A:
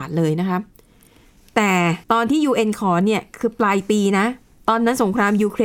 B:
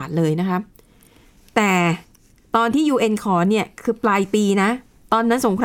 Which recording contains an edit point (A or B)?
A